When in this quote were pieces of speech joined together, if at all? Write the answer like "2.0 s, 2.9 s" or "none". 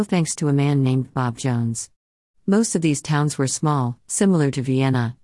2.4 s